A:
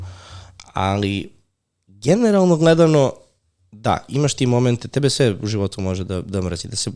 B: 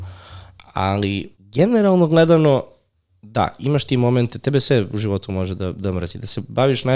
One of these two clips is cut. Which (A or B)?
B